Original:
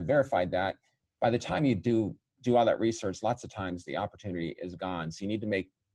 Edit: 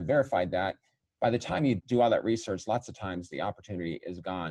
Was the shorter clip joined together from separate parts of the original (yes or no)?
yes